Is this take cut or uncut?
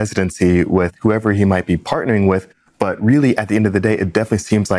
uncut